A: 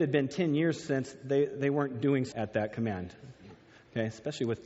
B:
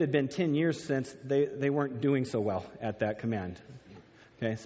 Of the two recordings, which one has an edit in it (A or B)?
A